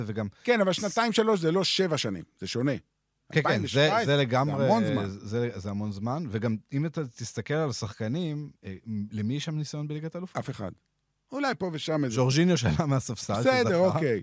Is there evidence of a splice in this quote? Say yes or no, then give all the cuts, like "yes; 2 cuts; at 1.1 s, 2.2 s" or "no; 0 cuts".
no; 0 cuts